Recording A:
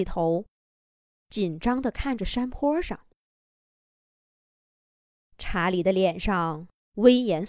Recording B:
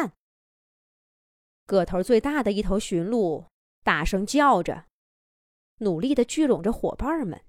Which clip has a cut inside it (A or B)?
B